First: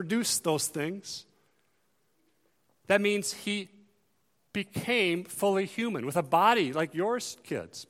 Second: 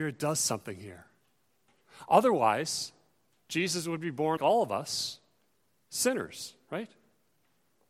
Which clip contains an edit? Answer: second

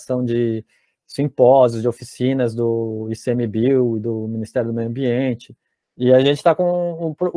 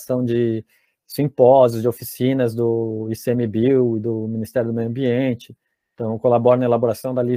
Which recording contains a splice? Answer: first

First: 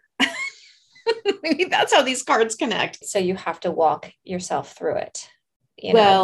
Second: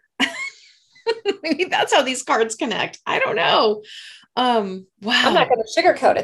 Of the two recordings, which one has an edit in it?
first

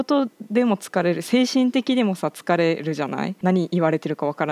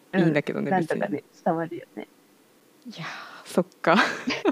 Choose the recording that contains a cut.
first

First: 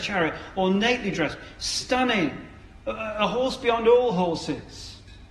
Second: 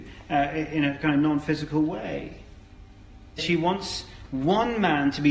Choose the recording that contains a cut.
second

